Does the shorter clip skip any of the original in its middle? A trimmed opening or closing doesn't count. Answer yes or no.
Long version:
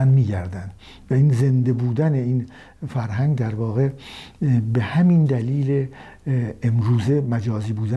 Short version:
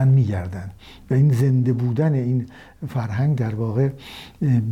no